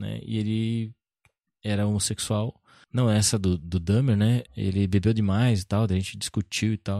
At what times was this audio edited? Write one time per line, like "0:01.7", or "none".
0:02.8
0:04.5